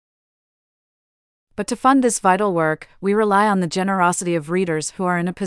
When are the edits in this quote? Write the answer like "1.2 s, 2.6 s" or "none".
none

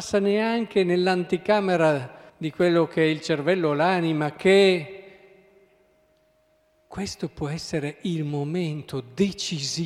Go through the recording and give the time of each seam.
2.3 s

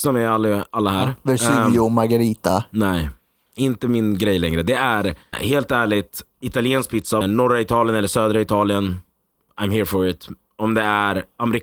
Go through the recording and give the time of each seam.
5.3 s, 7.2 s

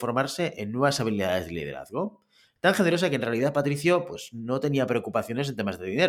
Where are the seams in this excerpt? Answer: 2.6 s

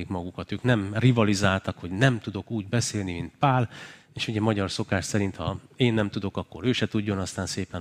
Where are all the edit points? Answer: none

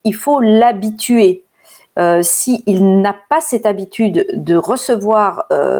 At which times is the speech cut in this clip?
none

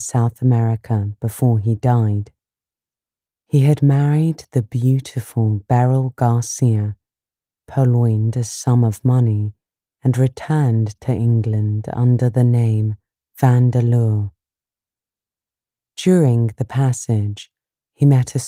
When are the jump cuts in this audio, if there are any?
none

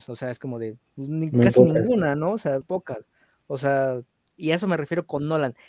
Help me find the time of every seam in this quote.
2.6 s

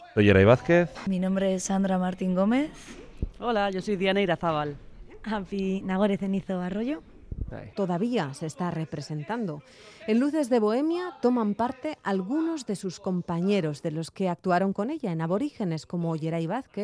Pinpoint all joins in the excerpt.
7.7 s

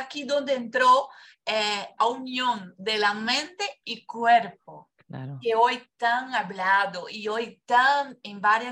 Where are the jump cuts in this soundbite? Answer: 2.0 s

